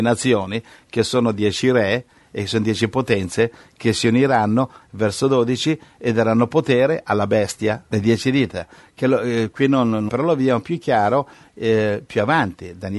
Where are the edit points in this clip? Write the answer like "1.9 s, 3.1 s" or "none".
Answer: 4.8 s, 7.9 s, 10.1 s